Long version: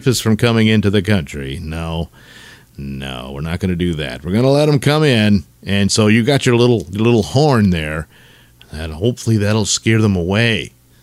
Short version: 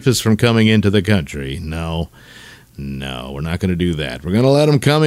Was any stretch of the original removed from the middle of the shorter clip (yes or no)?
no